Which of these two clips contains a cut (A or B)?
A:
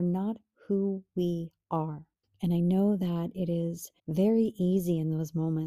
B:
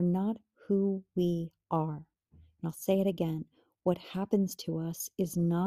A